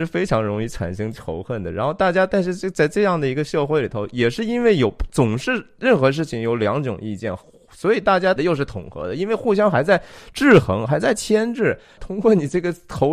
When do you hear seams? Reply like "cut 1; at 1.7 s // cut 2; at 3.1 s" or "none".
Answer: cut 1; at 8.4 s // cut 2; at 12.0 s